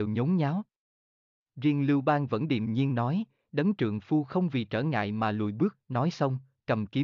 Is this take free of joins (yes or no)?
yes